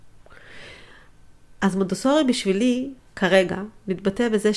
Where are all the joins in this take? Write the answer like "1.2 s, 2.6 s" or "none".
none